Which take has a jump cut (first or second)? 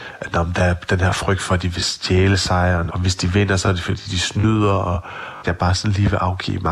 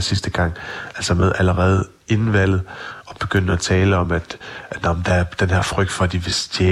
first